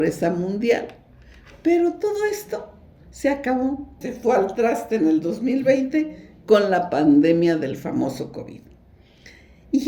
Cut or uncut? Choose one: cut